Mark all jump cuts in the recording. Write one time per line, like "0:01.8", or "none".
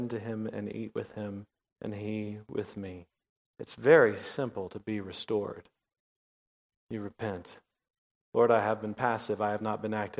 none